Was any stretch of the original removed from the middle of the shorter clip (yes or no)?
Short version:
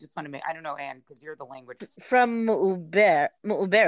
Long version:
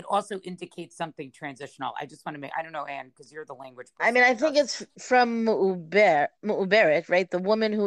yes